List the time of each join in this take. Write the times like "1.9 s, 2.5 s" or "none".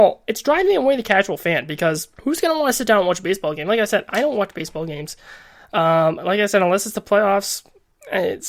2.2 s